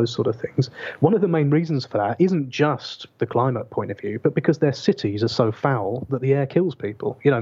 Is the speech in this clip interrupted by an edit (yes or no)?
no